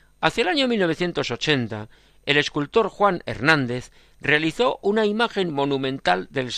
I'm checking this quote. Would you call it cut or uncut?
uncut